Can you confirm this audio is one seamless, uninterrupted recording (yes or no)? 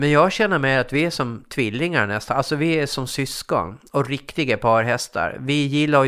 yes